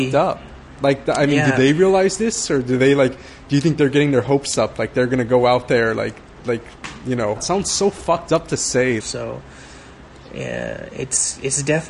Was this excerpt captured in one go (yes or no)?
no